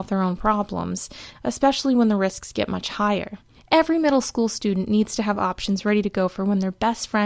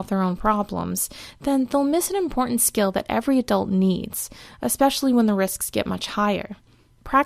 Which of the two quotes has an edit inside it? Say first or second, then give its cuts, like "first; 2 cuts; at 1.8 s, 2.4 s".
first; 2 cuts; at 1.3 s, 3.5 s